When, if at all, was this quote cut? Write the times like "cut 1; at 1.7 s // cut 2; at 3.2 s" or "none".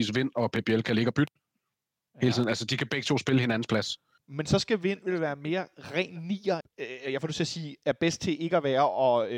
cut 1; at 4.2 s // cut 2; at 6.6 s

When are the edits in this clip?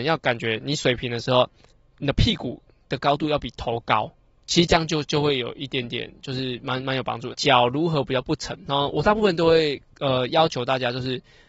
cut 1; at 7.3 s

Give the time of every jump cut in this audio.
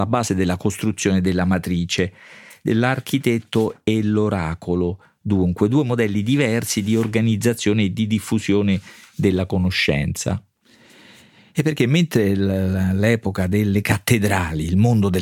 none

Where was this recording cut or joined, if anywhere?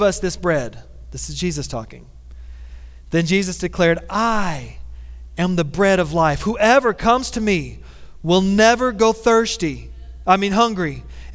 none

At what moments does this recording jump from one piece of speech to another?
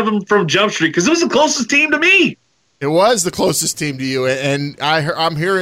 none

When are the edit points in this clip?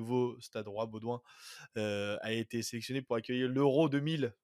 none

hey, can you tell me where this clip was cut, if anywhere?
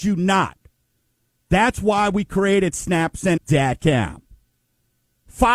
cut 1; at 3.4 s

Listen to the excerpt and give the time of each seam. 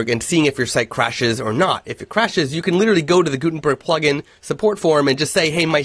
none

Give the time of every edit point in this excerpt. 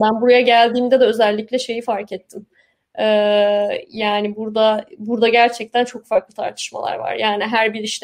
none

